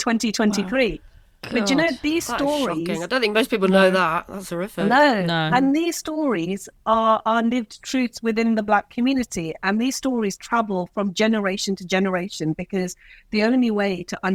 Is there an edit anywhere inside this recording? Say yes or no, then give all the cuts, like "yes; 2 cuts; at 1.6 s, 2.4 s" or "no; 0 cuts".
no; 0 cuts